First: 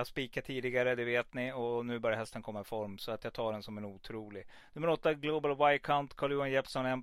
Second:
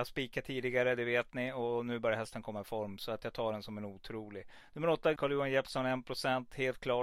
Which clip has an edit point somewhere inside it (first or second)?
second